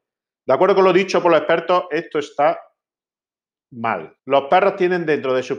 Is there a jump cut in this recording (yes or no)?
yes